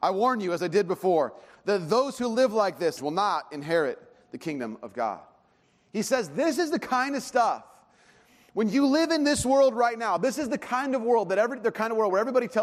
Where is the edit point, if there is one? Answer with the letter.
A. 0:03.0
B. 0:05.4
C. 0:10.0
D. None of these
A